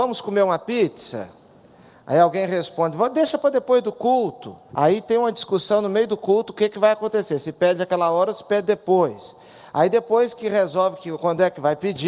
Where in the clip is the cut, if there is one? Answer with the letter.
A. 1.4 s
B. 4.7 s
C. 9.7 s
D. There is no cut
B